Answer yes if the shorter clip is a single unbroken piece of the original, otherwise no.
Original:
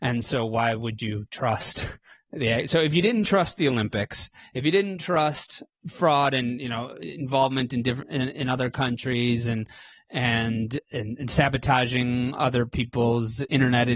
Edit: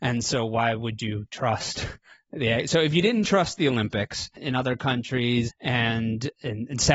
no